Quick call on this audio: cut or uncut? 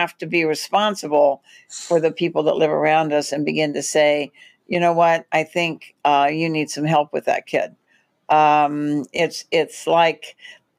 uncut